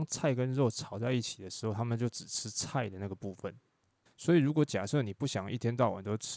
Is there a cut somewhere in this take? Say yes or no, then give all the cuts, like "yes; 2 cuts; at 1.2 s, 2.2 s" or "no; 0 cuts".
yes; 1 cut; at 4.1 s